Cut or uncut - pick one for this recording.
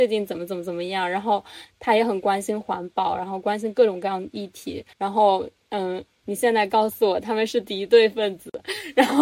cut